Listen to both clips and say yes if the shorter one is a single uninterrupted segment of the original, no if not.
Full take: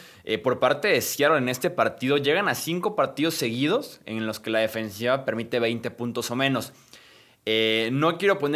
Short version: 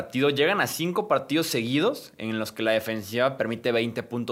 yes